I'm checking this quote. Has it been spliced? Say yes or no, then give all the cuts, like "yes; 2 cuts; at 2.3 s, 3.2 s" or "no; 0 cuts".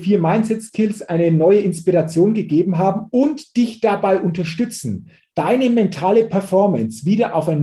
no; 0 cuts